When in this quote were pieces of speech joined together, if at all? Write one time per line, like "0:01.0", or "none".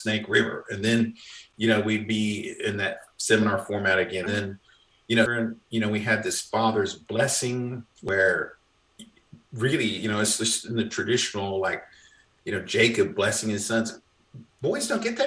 0:04.3
0:05.3